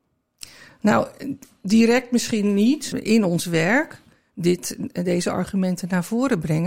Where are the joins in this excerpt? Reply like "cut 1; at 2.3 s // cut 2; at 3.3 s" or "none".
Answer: cut 1; at 2.9 s

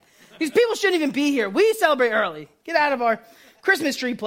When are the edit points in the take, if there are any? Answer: none

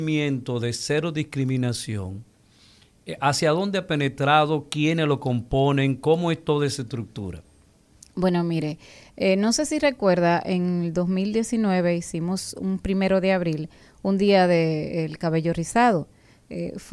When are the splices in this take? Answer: none

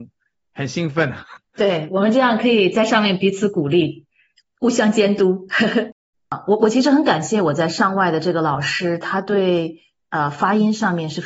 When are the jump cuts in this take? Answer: cut 1; at 6.1 s

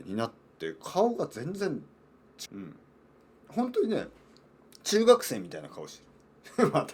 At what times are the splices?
cut 1; at 2.4 s

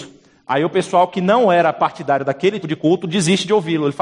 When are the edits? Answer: cut 1; at 2.6 s

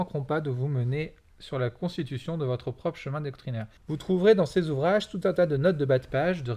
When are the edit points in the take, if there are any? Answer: cut 1; at 3.8 s

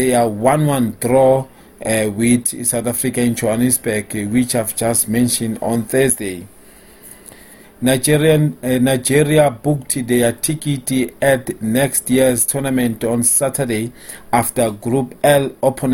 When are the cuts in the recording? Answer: cut 1; at 7.6 s

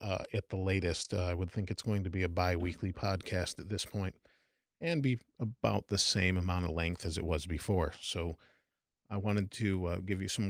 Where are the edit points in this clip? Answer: none

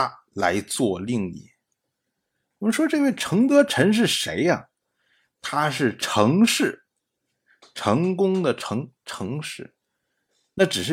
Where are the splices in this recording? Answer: none

